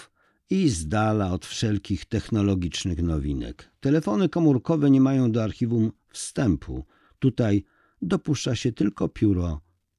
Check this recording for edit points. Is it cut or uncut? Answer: uncut